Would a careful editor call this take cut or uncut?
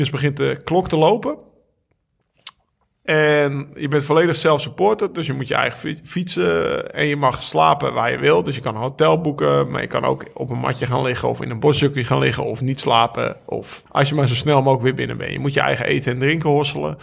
cut